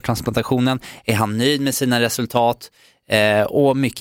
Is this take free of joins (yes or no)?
yes